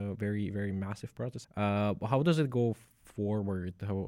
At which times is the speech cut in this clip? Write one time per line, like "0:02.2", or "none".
0:01.4